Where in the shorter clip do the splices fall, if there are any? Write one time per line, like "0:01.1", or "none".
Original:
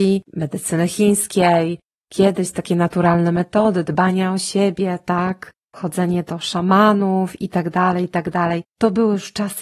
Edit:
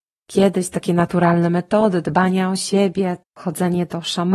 0:03.2